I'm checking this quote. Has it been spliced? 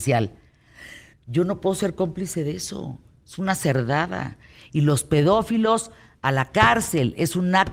yes; 1 cut; at 1.1 s

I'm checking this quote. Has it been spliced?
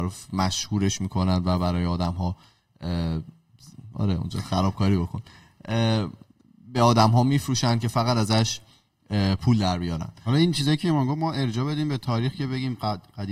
no; 0 cuts

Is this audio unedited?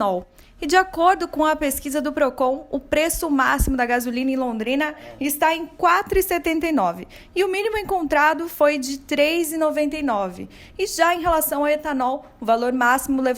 yes; 0 cuts

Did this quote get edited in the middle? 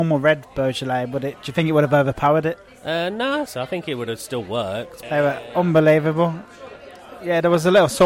yes; 2 cuts; at 3.5 s, 5.0 s

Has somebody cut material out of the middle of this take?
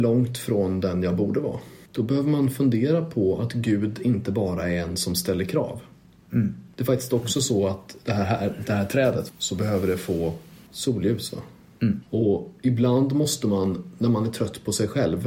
yes; 2 cuts; at 9.3 s, 12.0 s

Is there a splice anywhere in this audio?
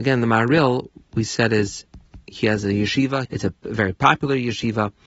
yes; 1 cut; at 3.3 s

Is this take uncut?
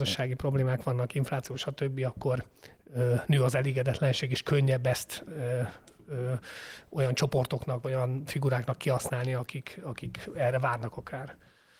yes; 0 cuts

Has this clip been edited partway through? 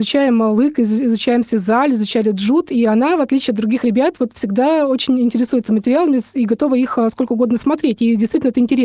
no; 0 cuts

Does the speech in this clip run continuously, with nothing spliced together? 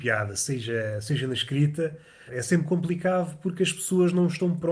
no; 1 cut; at 2.3 s

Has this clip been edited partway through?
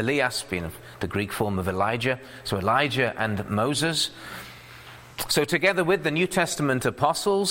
no; 0 cuts

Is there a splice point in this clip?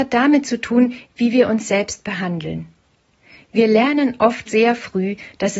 yes; 1 cut; at 4.5 s

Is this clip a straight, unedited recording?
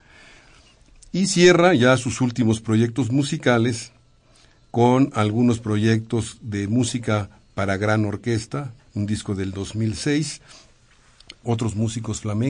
no; 2 cuts; at 8.8 s, 11.4 s

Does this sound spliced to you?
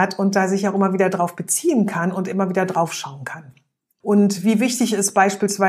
yes; 1 cut; at 4.0 s

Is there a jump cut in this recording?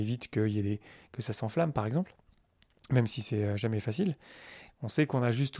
yes; 1 cut; at 4.7 s

